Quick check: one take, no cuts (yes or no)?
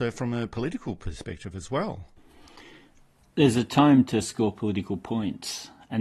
yes